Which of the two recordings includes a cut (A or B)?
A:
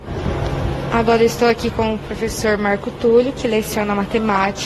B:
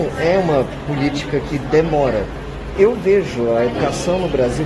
B